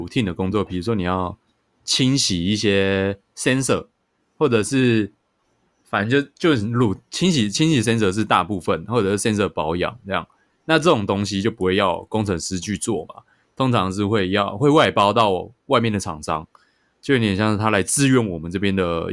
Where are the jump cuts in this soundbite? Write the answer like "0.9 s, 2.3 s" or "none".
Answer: none